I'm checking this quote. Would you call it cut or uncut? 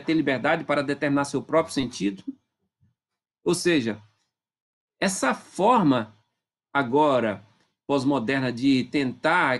cut